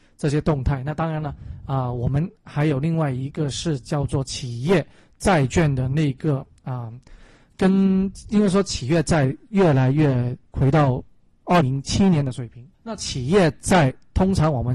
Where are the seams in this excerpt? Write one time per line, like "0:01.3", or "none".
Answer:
0:11.6
0:12.7